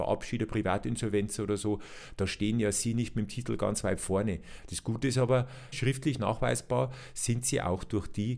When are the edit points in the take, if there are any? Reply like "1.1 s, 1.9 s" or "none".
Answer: 4.6 s, 5.7 s